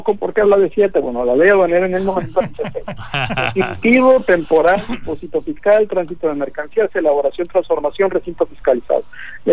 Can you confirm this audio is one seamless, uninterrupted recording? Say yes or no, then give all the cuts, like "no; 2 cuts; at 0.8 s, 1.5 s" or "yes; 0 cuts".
yes; 0 cuts